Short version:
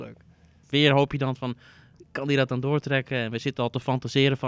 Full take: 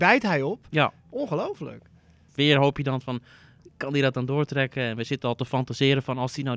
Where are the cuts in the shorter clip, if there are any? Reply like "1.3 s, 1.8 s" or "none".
none